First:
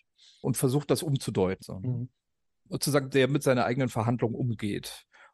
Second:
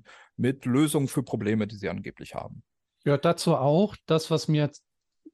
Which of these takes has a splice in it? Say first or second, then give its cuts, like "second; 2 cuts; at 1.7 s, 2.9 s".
first; 2 cuts; at 1.6 s, 3.1 s